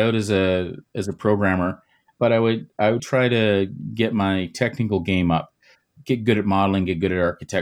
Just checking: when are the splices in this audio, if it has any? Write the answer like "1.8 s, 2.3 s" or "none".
3.0 s

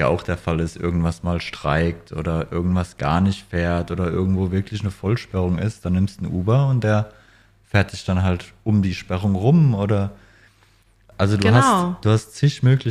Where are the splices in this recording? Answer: none

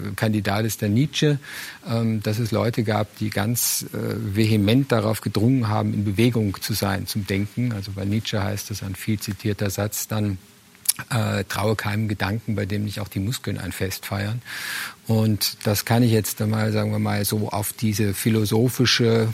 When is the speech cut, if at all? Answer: none

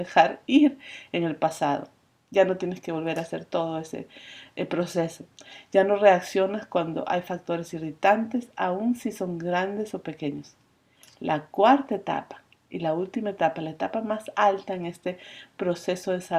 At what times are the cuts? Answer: none

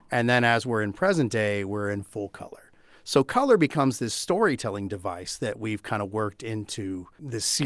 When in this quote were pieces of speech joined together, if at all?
none

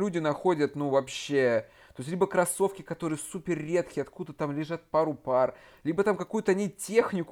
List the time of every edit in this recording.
none

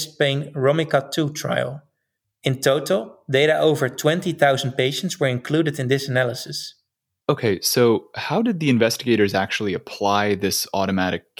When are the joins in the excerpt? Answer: 2.2 s, 7.2 s

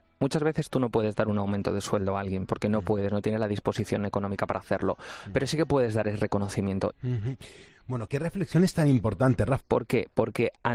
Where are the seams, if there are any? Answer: 6.9 s, 8.1 s, 9.6 s

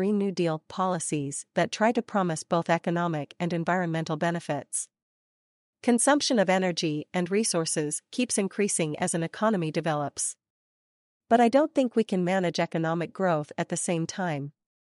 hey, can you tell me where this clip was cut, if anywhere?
11.2 s

